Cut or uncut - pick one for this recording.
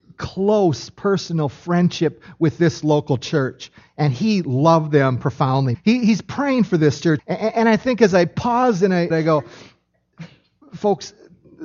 cut